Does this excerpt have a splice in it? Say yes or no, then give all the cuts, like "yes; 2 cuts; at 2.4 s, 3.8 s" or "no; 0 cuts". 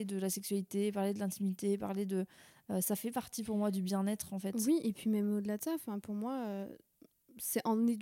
no; 0 cuts